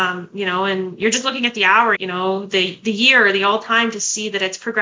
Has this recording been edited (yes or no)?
yes